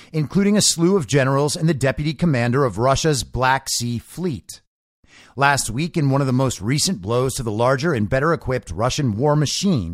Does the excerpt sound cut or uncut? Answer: uncut